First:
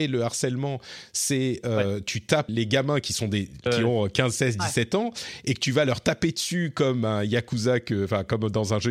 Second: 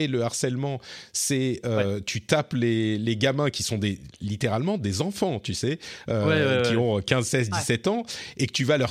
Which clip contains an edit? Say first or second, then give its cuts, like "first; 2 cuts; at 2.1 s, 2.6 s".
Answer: first; 2 cuts; at 2.5 s, 3.7 s